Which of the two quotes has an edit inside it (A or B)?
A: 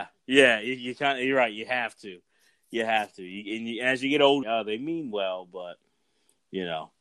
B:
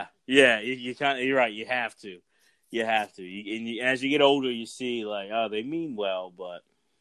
A